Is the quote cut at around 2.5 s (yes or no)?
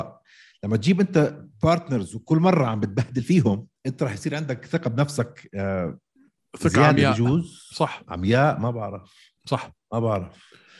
no